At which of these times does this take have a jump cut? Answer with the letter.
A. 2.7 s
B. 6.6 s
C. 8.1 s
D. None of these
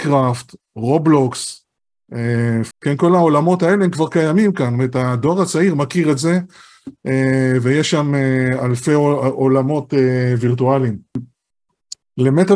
A